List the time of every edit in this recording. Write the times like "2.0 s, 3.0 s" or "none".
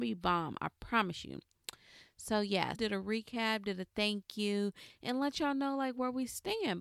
2.8 s